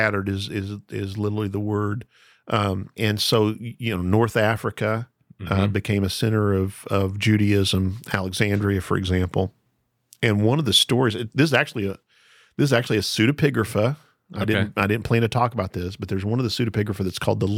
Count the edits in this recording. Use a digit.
1